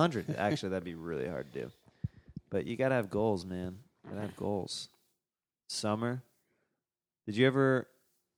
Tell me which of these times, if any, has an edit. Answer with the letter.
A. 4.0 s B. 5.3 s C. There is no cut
C